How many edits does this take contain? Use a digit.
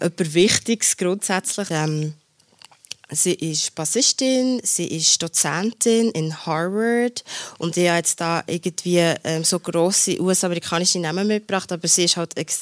1